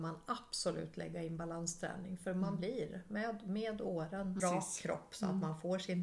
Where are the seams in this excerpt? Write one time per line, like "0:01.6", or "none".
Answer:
0:04.4